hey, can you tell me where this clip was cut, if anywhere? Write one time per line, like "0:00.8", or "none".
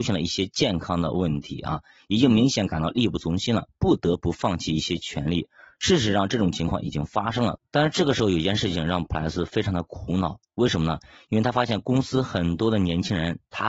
0:07.6

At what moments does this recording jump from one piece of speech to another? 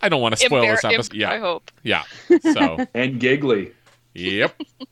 0:01.1

